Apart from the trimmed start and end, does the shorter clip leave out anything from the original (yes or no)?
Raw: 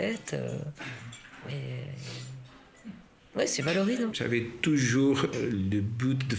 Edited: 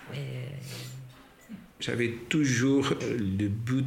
yes